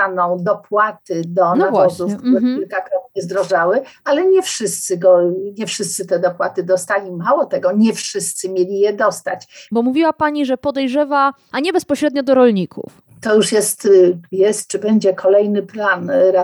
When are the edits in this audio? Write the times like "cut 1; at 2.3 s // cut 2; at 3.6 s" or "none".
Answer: cut 1; at 9.7 s // cut 2; at 11.5 s